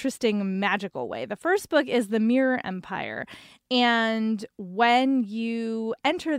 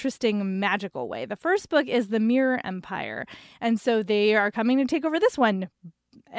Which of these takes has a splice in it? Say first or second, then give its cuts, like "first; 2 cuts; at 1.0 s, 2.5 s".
second; 1 cut; at 3.6 s